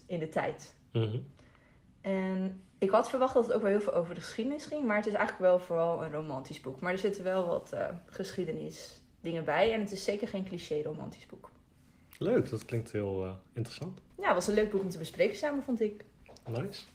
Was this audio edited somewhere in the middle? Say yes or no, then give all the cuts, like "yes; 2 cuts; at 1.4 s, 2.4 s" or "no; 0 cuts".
no; 0 cuts